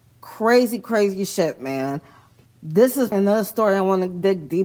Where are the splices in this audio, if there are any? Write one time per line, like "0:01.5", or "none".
0:03.1